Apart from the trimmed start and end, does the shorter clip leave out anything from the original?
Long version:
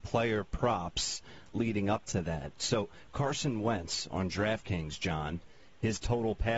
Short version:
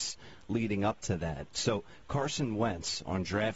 no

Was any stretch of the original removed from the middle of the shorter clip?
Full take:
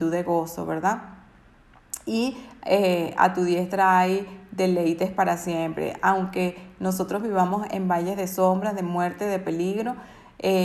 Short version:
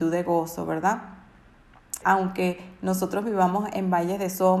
yes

